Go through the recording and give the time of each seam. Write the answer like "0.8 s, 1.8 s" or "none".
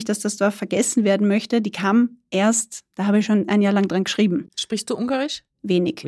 none